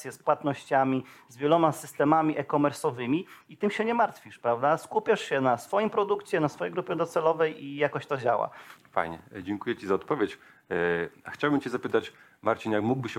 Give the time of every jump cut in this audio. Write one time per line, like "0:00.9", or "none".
0:08.8